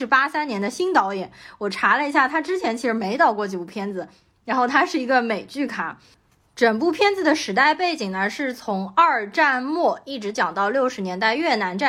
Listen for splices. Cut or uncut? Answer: uncut